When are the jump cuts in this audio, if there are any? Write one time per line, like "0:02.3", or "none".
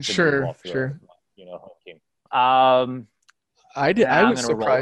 0:02.3